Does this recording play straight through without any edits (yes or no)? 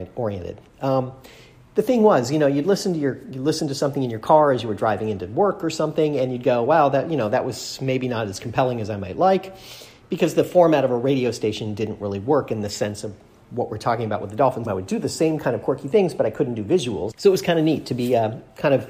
no